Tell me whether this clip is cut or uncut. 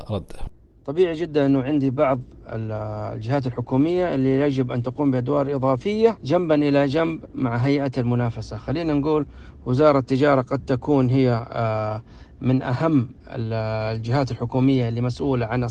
uncut